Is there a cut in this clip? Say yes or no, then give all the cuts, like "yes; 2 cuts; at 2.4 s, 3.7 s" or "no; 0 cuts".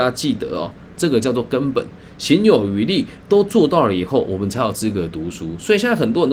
yes; 1 cut; at 0.9 s